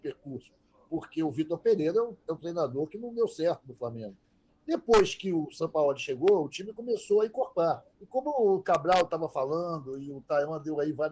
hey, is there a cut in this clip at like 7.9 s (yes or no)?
yes